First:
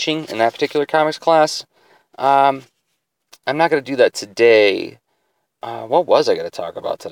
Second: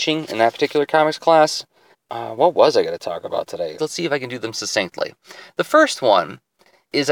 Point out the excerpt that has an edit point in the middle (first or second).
second